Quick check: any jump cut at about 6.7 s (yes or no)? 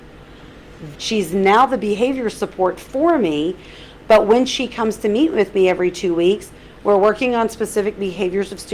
no